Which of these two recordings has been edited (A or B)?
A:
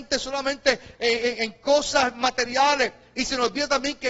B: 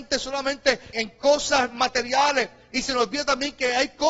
B